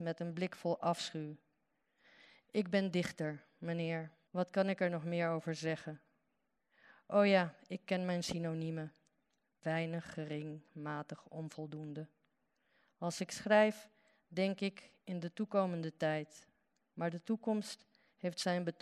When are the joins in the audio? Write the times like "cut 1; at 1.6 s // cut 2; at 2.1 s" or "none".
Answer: cut 1; at 4.3 s

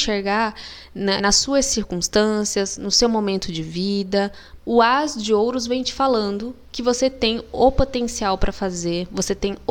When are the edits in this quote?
cut 1; at 1.2 s // cut 2; at 4.6 s

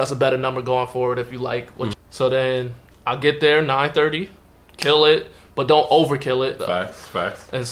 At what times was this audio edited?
cut 1; at 1.9 s // cut 2; at 6.6 s

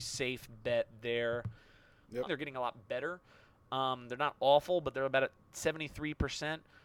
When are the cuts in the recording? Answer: cut 1; at 2.3 s

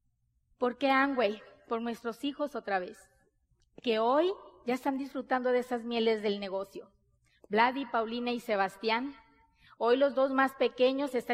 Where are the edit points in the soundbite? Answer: none

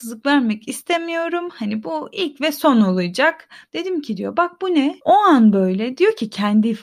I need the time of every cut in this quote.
cut 1; at 3.7 s // cut 2; at 5.0 s

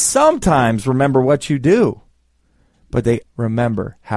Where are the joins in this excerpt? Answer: cut 1; at 3.2 s

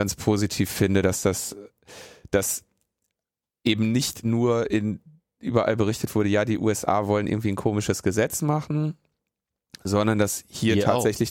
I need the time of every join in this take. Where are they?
none

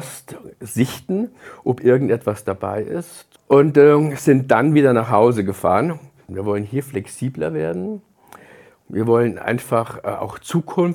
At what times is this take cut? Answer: cut 1; at 3.4 s // cut 2; at 6.3 s

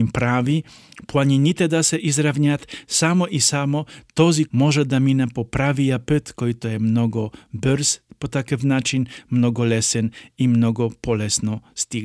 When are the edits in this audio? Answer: cut 1; at 4.5 s

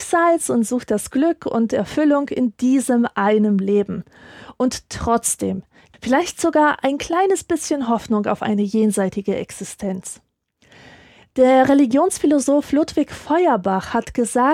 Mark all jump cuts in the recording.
cut 1; at 5.9 s

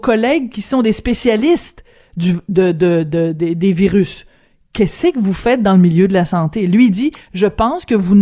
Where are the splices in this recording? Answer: none

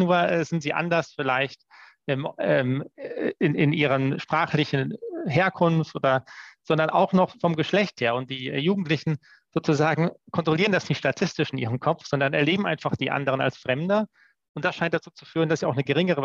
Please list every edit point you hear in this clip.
none

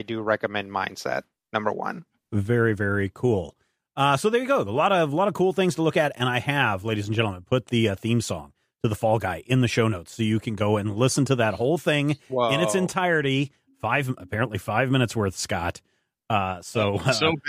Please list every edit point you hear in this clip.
none

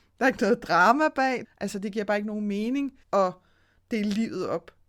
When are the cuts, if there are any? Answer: cut 1; at 1.4 s // cut 2; at 3.0 s

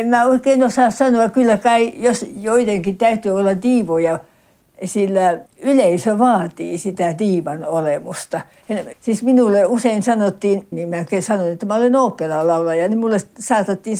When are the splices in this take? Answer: cut 1; at 8.9 s // cut 2; at 10.7 s

